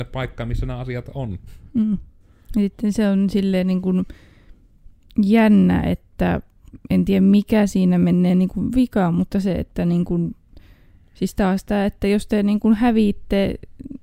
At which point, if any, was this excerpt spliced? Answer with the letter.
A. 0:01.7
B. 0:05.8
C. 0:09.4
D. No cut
D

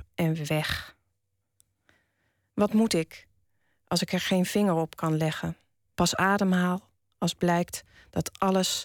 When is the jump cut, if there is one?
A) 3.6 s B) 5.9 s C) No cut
B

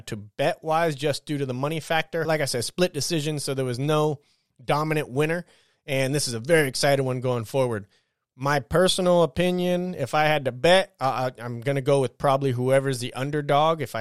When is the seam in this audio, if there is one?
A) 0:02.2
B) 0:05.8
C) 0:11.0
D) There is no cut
A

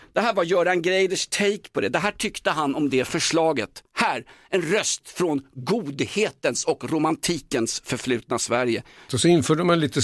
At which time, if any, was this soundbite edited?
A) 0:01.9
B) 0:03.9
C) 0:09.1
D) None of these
C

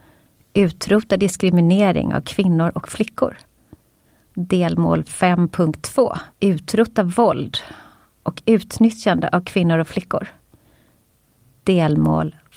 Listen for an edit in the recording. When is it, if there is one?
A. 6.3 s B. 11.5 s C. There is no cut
A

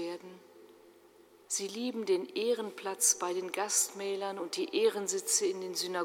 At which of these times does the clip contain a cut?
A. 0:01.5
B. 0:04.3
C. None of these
A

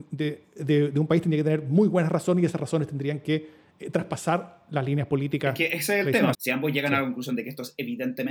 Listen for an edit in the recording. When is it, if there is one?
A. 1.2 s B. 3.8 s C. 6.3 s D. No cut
C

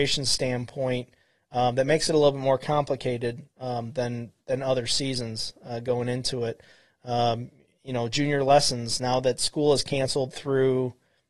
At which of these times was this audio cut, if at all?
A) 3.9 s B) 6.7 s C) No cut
C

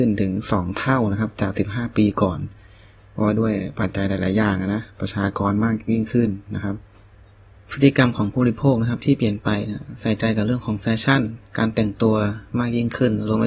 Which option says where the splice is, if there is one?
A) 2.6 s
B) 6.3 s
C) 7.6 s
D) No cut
D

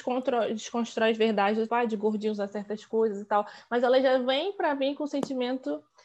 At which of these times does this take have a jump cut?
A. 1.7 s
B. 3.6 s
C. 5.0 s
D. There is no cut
A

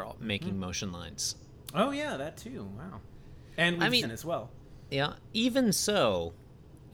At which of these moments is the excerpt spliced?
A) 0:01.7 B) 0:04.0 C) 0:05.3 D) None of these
B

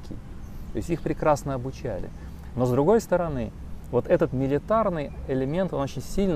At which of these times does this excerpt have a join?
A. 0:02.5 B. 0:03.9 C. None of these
C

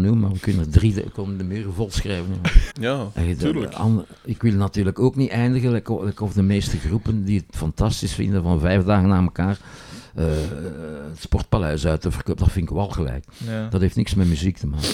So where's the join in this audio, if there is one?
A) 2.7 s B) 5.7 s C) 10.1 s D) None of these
A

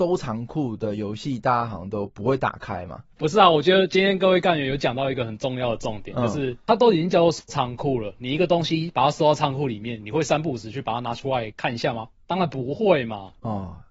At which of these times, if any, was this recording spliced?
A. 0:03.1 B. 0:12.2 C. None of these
A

